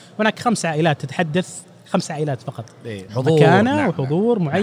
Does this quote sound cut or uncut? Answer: cut